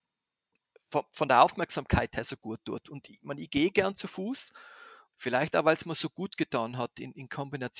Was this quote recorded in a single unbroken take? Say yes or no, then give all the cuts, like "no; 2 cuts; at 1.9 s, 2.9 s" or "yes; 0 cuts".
no; 1 cut; at 5.1 s